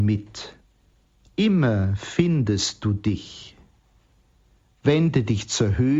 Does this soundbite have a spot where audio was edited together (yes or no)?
no